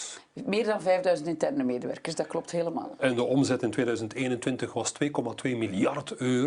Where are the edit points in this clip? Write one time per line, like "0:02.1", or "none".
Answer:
none